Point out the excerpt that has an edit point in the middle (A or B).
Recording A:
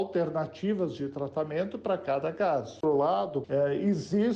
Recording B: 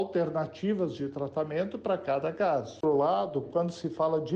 A